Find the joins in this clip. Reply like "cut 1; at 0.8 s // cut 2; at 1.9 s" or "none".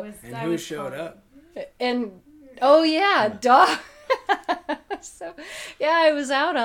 none